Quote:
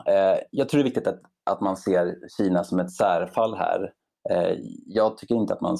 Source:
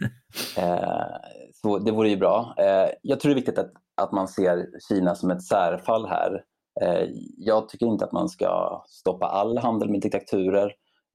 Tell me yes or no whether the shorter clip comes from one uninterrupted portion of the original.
yes